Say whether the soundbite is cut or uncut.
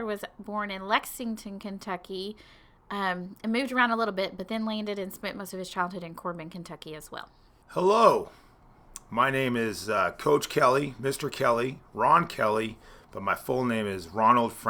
uncut